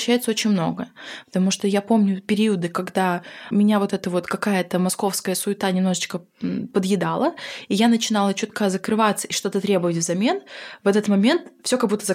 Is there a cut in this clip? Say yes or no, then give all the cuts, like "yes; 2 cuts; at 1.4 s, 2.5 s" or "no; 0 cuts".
no; 0 cuts